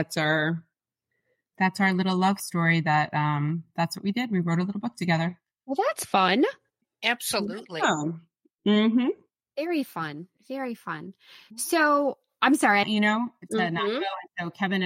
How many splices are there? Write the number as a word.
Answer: one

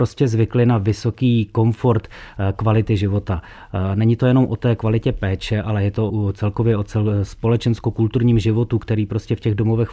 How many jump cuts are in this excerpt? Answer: one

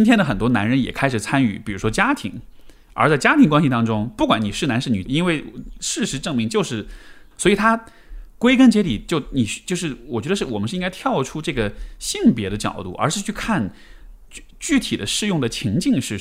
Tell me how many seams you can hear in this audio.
two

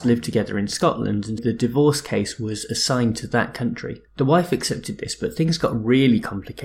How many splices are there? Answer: two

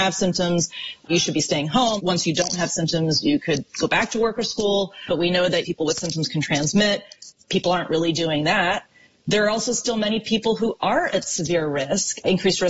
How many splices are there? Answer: two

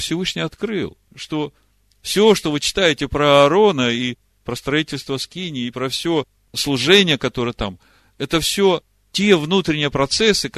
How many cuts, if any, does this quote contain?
one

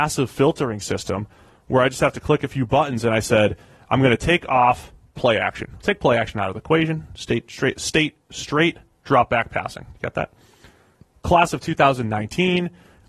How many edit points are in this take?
zero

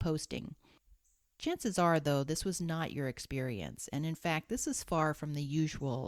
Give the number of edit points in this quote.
zero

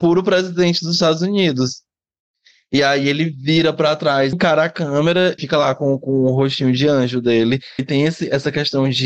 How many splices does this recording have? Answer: three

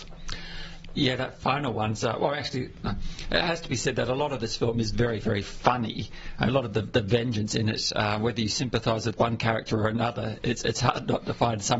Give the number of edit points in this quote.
zero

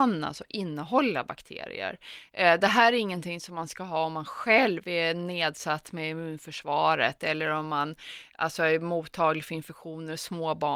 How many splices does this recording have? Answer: zero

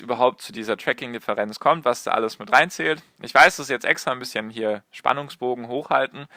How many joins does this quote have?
zero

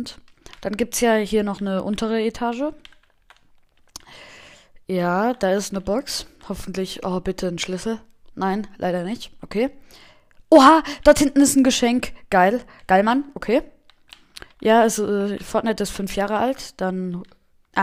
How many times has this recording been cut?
one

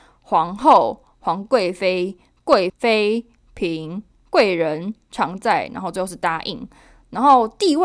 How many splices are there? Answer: one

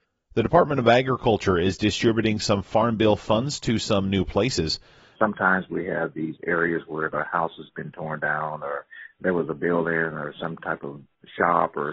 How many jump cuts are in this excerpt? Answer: two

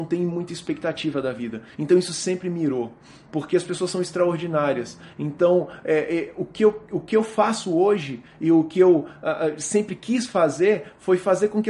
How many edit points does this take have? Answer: zero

